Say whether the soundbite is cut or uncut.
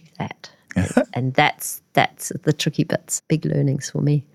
cut